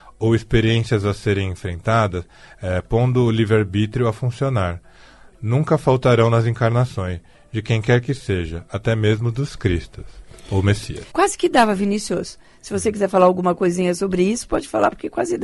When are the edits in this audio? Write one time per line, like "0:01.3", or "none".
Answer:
0:11.1

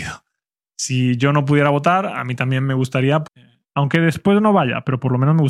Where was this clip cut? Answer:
0:03.3

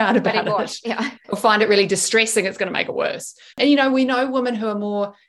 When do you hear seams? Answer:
0:03.5

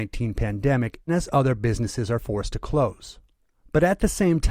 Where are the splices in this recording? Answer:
0:01.1

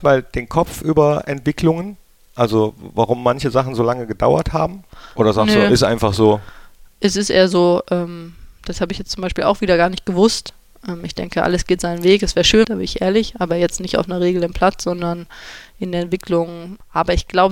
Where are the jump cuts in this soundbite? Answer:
0:12.6

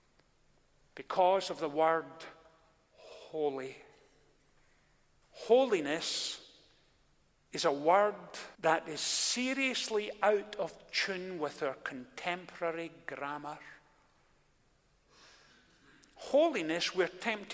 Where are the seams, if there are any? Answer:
0:05.2
0:08.5

